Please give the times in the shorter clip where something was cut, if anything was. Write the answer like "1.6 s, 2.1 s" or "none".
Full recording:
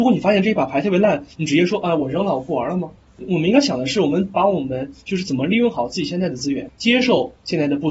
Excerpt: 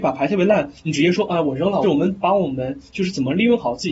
1.8 s